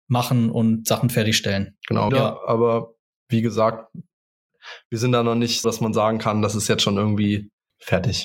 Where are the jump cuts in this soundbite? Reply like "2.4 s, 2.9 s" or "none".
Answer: 2.1 s, 5.6 s